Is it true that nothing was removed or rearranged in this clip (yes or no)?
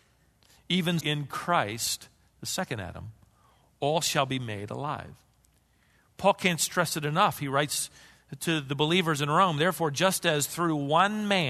no